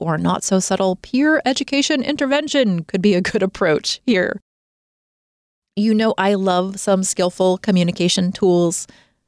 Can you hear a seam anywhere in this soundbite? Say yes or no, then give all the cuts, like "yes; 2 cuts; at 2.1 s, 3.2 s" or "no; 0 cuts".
no; 0 cuts